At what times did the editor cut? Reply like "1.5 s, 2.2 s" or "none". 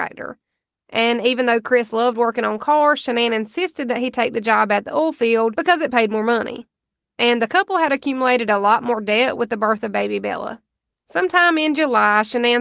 none